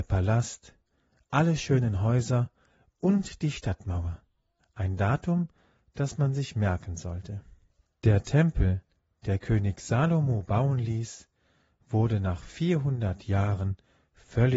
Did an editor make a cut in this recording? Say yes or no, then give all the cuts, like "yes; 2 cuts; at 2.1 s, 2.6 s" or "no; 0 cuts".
yes; 1 cut; at 4.6 s